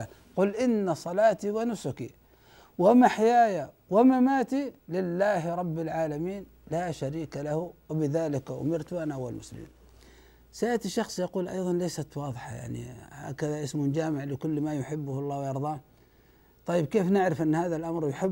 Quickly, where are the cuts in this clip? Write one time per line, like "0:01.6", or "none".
0:04.8